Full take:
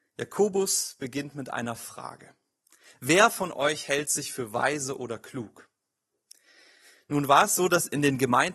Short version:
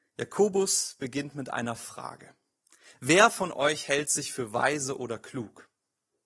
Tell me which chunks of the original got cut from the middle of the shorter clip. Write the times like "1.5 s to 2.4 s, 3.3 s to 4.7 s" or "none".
none